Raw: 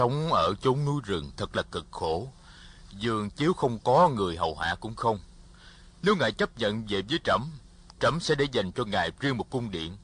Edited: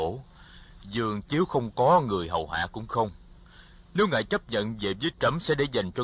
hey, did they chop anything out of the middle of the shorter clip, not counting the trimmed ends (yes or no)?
yes